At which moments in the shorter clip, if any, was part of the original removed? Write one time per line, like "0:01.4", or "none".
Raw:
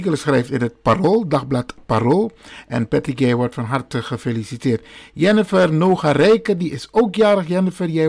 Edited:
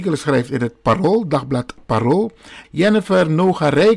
0:02.6